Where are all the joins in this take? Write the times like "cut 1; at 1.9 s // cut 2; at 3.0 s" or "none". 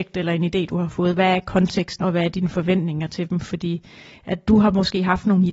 cut 1; at 2.0 s